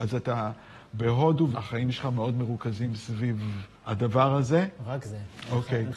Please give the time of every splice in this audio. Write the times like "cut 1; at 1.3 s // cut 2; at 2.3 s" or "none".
cut 1; at 1.5 s // cut 2; at 3.8 s

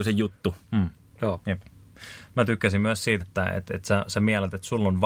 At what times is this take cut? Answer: cut 1; at 3.2 s

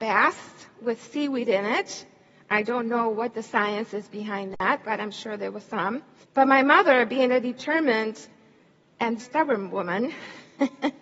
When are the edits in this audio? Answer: cut 1; at 6.2 s // cut 2; at 9.2 s

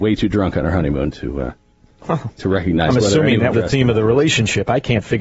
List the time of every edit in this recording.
cut 1; at 3.5 s

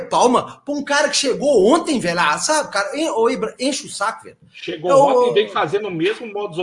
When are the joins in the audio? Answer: none

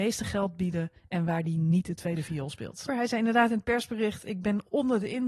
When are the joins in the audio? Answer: cut 1; at 2.9 s // cut 2; at 4.2 s

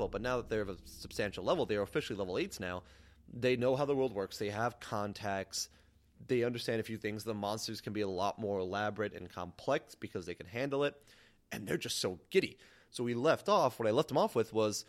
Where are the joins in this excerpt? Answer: none

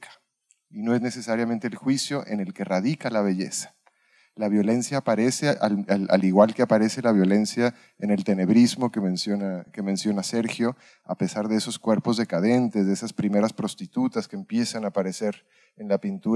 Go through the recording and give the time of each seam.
none

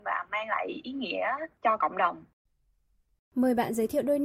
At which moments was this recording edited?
none

